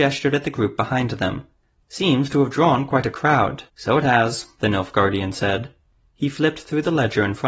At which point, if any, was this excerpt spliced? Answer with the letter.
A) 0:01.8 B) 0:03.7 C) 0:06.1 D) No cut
B